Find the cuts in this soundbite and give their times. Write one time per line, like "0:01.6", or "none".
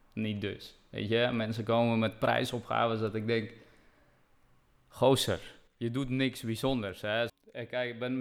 0:07.3